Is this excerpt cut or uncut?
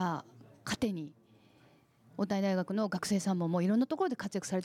uncut